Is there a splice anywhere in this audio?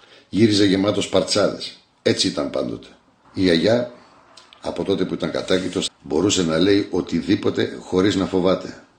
yes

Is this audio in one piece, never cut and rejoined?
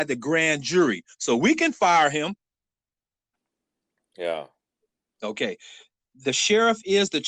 yes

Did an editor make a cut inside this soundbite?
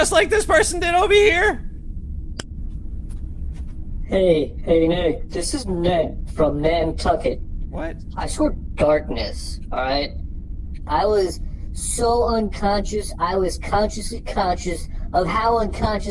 yes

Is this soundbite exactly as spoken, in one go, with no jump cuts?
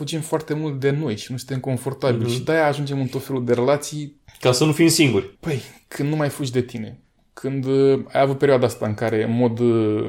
no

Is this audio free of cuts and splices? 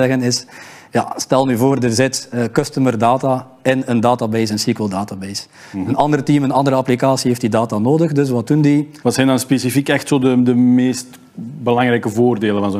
no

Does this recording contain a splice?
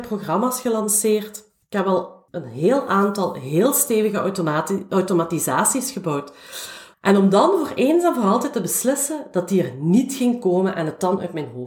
yes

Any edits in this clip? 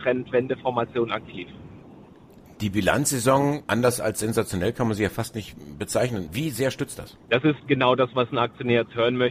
no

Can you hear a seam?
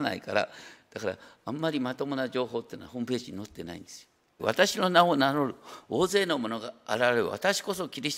yes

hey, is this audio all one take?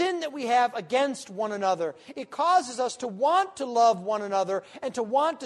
yes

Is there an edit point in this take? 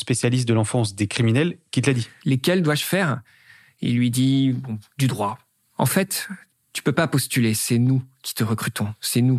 yes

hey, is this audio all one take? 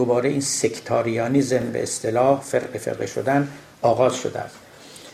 yes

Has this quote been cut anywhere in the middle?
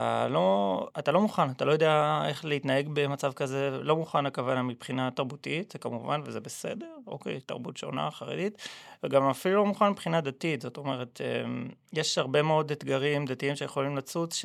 no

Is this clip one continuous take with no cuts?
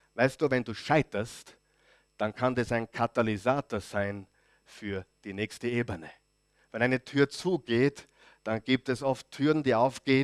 yes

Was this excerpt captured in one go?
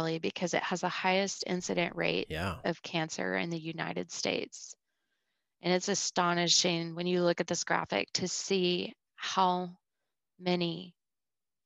yes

